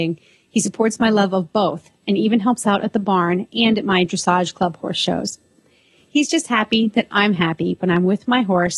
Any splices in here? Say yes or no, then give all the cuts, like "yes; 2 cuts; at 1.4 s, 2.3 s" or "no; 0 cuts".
no; 0 cuts